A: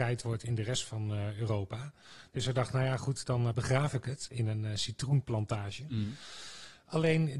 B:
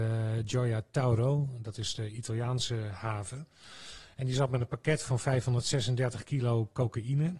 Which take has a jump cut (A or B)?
A